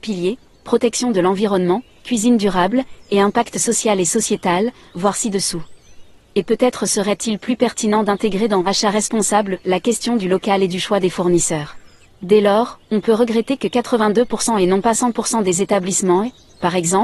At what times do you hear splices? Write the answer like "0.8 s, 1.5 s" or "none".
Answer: 6.3 s, 12.0 s